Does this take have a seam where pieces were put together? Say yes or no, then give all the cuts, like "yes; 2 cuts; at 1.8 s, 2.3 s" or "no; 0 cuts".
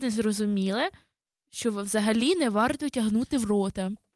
no; 0 cuts